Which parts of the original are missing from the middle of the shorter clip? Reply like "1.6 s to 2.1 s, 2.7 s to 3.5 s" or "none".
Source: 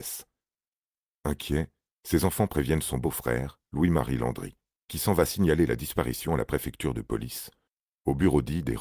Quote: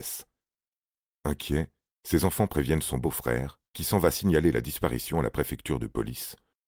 3.7 s to 4.8 s